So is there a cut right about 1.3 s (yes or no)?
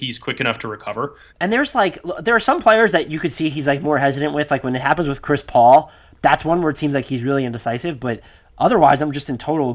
yes